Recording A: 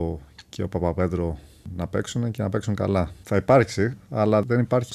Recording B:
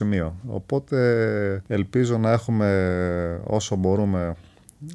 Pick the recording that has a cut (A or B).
A